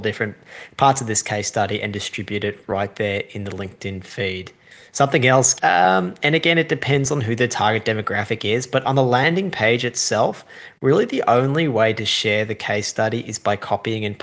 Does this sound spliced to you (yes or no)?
yes